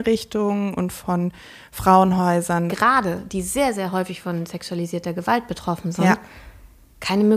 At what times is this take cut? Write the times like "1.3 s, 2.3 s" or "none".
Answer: 2.7 s

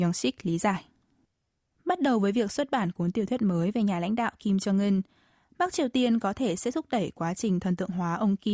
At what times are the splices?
1.7 s

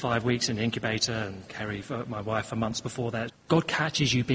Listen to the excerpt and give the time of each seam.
3.3 s

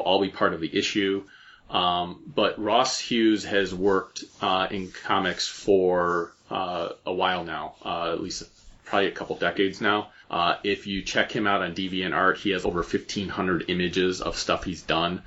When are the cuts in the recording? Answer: 10.2 s, 12.6 s

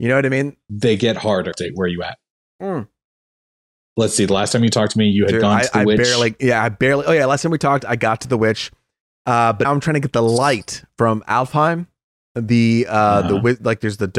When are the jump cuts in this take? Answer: 1.5 s, 9.6 s

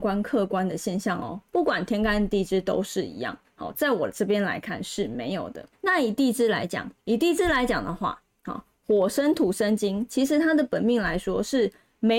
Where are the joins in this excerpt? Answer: 5.7 s, 7.0 s

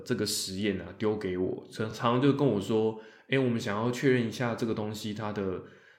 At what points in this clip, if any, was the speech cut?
none

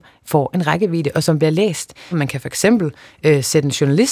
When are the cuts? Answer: 2.1 s

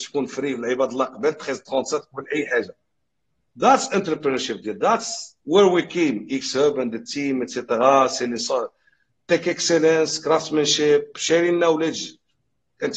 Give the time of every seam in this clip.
5.4 s

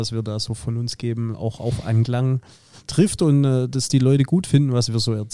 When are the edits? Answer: none

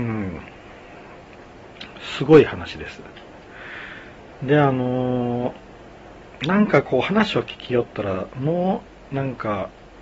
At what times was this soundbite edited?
none

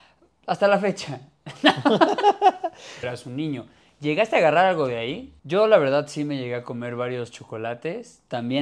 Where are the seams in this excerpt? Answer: 3.0 s, 5.4 s

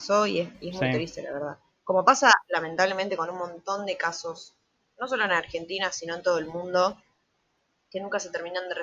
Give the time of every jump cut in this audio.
none

